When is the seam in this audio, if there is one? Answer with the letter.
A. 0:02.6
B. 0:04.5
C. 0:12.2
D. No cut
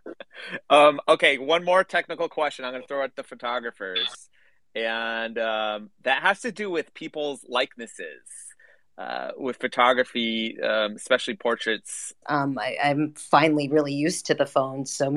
C